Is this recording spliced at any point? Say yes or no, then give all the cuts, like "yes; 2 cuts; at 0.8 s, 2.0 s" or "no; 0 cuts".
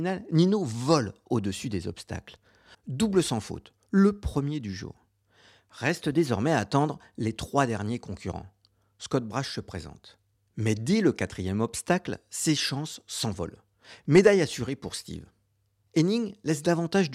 yes; 1 cut; at 2.7 s